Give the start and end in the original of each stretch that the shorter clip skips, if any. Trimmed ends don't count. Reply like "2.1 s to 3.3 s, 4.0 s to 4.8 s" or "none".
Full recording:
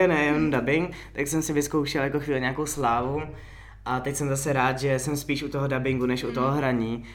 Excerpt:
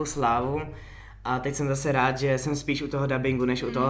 none